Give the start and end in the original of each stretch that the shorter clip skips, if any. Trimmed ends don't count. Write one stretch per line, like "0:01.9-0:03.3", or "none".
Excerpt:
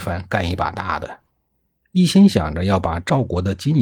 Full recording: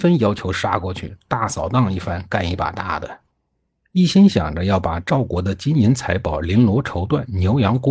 none